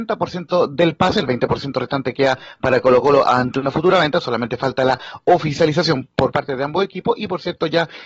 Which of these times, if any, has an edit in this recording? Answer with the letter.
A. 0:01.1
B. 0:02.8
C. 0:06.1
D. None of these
C